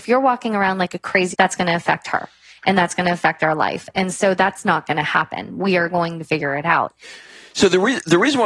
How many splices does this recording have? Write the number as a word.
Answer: one